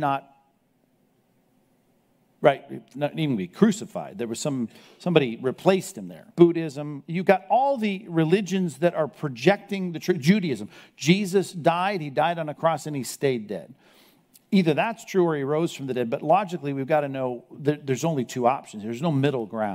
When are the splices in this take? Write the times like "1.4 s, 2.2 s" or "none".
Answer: 6.3 s